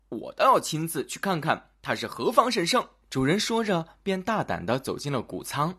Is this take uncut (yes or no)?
no